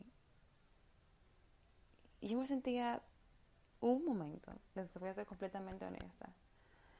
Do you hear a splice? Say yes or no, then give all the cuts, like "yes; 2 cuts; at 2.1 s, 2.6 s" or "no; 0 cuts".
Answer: no; 0 cuts